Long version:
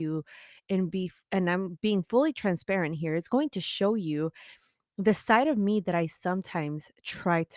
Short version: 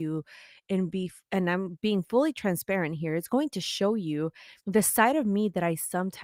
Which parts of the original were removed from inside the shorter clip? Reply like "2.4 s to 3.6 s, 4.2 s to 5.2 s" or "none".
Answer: 4.6 s to 4.9 s